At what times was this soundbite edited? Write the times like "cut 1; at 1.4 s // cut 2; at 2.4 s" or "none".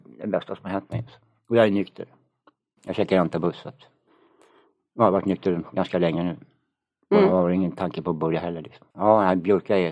cut 1; at 8.9 s